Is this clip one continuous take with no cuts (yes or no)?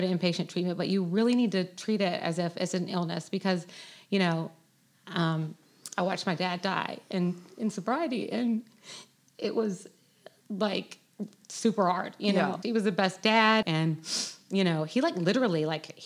no